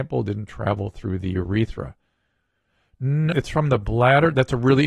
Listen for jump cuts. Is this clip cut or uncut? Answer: cut